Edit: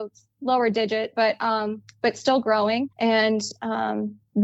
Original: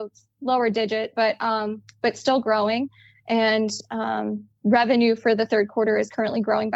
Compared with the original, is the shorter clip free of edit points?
no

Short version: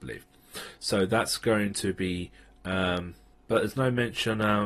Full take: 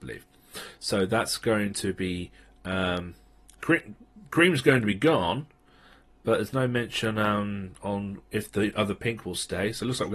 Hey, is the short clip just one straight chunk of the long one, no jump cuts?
no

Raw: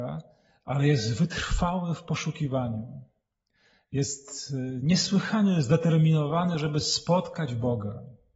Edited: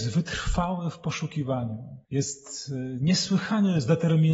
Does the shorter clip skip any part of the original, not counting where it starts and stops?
yes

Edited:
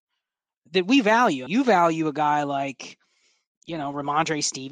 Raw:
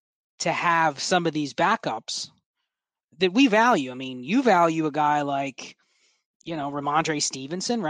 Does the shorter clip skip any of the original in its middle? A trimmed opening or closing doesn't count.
yes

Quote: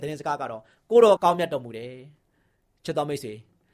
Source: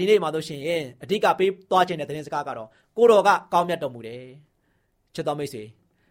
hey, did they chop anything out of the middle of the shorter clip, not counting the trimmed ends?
yes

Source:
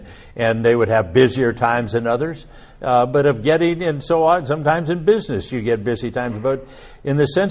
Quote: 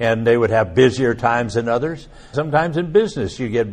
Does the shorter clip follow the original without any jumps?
no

